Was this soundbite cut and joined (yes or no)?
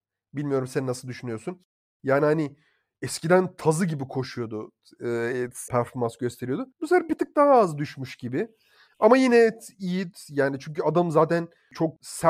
yes